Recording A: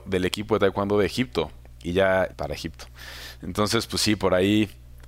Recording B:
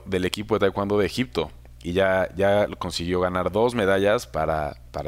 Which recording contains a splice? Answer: A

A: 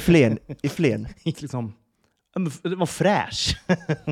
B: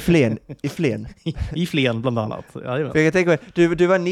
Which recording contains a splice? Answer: A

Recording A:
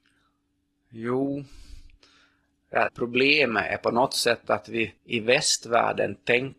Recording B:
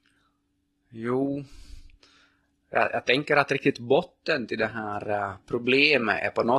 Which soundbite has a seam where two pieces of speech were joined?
A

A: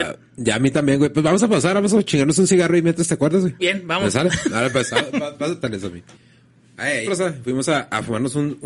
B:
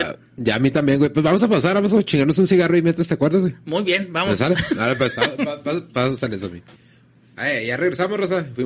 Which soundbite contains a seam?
A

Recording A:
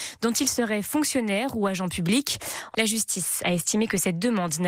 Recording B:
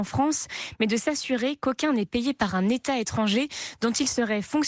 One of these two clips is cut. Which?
A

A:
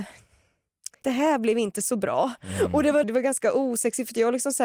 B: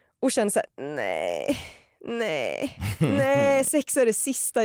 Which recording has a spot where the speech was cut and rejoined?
A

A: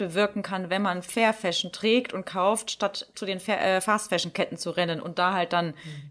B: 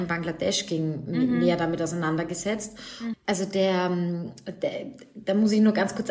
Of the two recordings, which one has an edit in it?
B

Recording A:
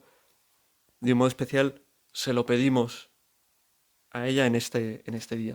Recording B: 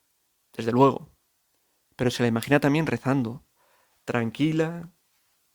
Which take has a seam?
A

